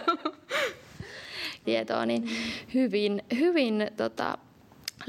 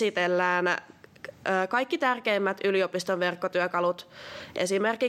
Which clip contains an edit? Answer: first; 1 cut; at 1.6 s

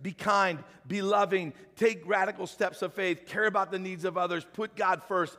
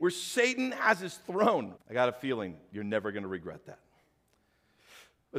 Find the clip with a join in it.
second; 1 cut; at 1.8 s

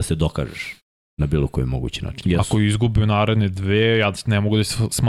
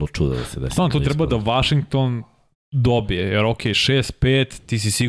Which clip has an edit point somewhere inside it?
first; 1 cut; at 2.2 s

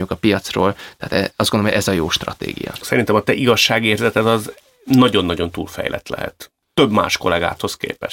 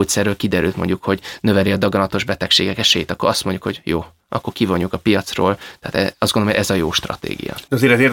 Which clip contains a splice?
first; 1 cut; at 2.8 s

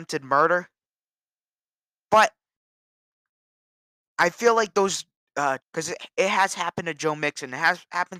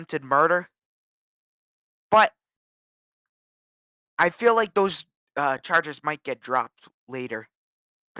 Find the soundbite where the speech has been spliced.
first; 1 cut; at 5.6 s

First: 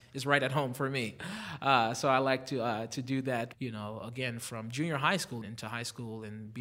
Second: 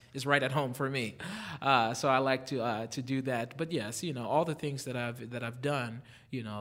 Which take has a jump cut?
first; 2 cuts; at 3.5 s, 5.4 s

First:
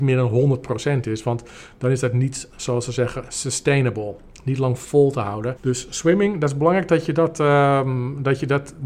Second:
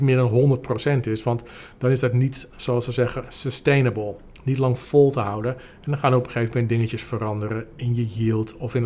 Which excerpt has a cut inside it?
first; 1 cut; at 5.6 s

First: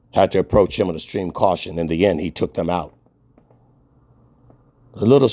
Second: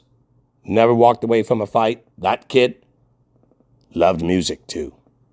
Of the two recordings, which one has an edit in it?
second; 1 cut; at 2.1 s

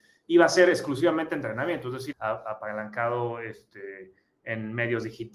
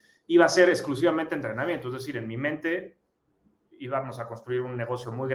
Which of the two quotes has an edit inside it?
first; 1 cut; at 2.1 s

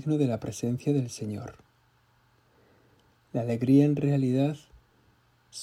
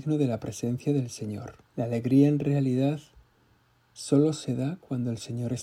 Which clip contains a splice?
second; 1 cut; at 1.6 s

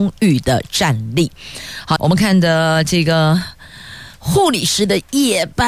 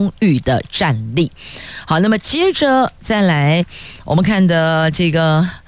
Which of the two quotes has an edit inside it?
first; 1 cut; at 2.0 s

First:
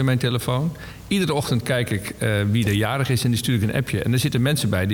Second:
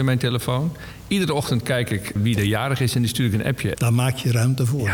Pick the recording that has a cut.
second; 2 cuts; at 2.2 s, 3.7 s

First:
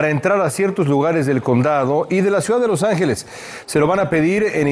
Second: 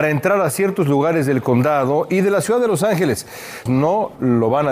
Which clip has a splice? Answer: second; 1 cut; at 3.7 s

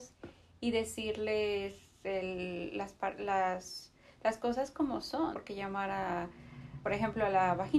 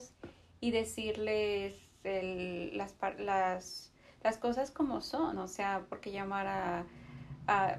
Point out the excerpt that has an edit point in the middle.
first; 2 cuts; at 5.3 s, 6.8 s

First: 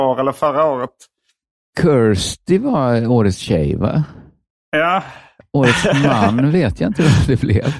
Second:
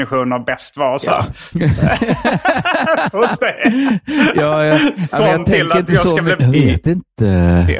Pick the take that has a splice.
second; 2 cuts; at 1.5 s, 6.4 s

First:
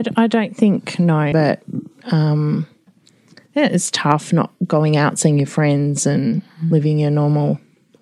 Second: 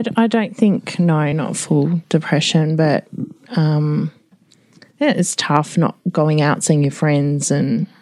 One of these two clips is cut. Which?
first; 1 cut; at 1.3 s

